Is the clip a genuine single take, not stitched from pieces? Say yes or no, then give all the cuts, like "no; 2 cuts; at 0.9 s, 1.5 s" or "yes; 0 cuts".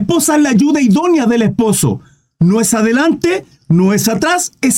yes; 0 cuts